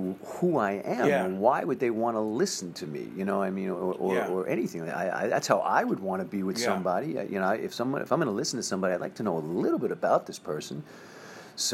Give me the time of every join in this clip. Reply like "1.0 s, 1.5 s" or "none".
none